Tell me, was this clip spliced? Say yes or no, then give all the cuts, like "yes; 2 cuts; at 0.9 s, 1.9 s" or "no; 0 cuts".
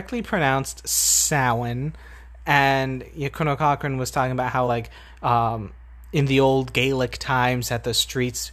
no; 0 cuts